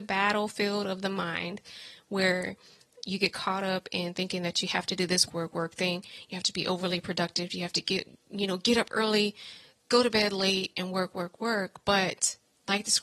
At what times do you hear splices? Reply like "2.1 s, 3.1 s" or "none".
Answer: 5.3 s

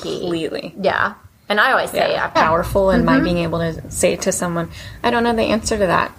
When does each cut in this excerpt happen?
2.4 s

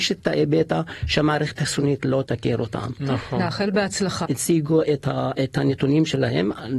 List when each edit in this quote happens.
4.3 s

